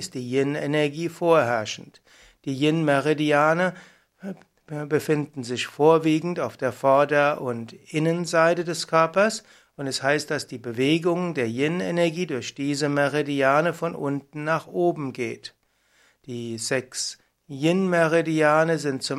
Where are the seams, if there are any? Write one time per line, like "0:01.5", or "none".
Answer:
none